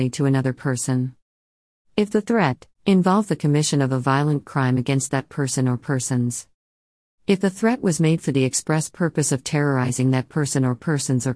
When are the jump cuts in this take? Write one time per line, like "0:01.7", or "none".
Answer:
none